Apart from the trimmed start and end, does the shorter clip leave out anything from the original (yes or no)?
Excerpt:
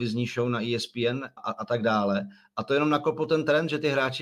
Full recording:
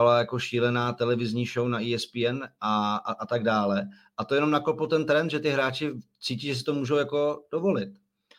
yes